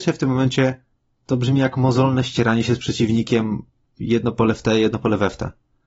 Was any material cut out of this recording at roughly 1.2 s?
yes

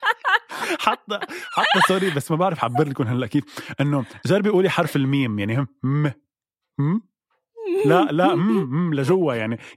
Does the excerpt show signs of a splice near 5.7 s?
no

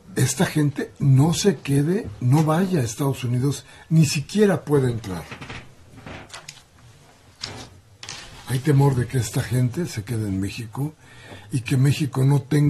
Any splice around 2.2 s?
no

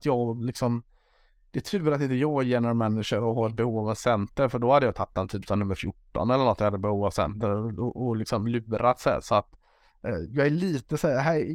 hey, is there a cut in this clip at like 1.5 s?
no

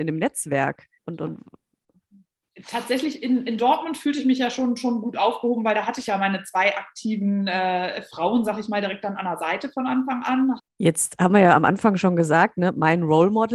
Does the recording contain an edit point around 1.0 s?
yes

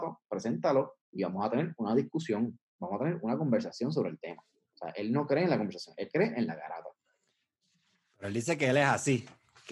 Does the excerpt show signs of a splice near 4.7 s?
yes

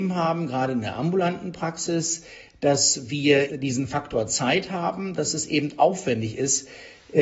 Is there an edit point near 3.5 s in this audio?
yes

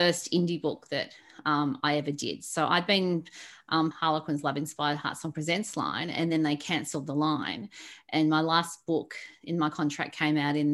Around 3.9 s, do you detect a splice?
yes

